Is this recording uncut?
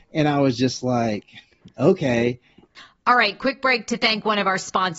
yes; 0 cuts

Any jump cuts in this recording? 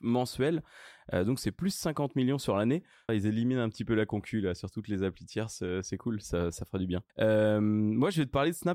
yes; 2 cuts; at 3.1 s, 7.1 s

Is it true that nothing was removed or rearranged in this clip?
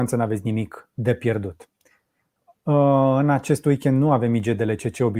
no; 1 cut; at 0.9 s

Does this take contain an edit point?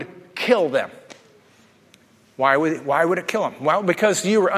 no; 0 cuts

